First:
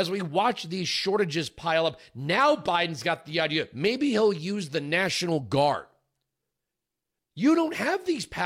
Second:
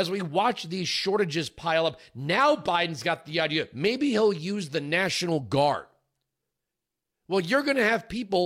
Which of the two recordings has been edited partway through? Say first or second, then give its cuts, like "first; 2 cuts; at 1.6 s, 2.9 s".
first; 1 cut; at 7.2 s